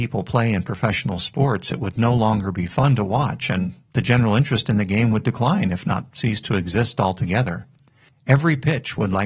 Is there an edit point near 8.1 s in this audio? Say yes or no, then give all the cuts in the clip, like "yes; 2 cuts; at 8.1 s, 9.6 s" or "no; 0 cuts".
yes; 1 cut; at 8.1 s